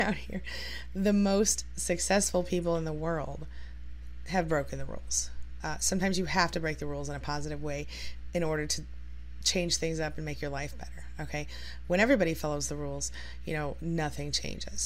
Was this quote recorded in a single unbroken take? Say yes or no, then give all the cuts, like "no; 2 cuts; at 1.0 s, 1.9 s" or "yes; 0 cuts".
yes; 0 cuts